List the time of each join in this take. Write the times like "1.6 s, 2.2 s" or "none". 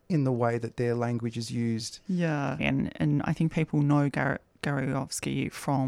2.6 s